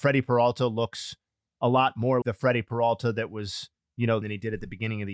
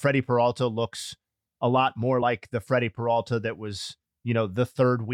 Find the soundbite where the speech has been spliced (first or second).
first